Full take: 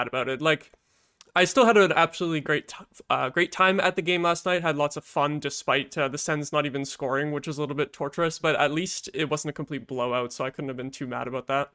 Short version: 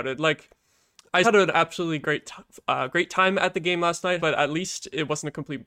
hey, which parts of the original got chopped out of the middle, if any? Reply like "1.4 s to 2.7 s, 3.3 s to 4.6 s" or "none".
1.5 s to 1.7 s, 4.6 s to 8.4 s